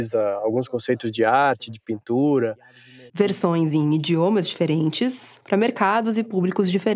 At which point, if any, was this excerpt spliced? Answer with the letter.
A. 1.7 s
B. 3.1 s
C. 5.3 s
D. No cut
B